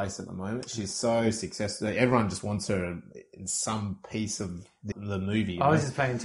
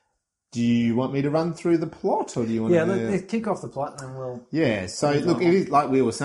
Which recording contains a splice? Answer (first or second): first